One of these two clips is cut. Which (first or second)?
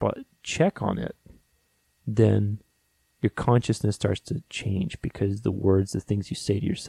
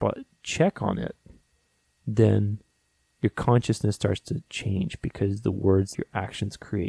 second